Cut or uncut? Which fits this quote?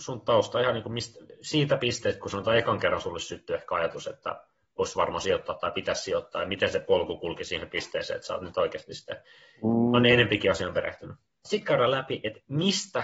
cut